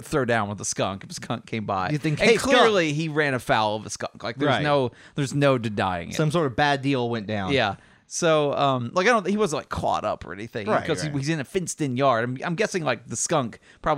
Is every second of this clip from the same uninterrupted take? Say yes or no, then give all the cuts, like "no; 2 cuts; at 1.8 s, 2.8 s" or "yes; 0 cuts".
yes; 0 cuts